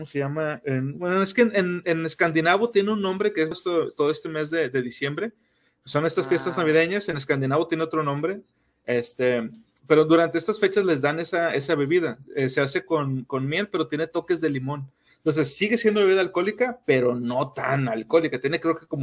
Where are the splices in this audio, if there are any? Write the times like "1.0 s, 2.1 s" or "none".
3.5 s